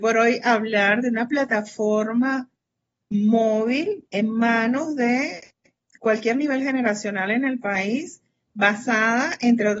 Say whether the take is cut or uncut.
uncut